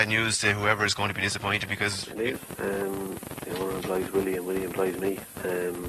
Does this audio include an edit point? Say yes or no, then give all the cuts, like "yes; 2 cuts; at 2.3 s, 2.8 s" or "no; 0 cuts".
no; 0 cuts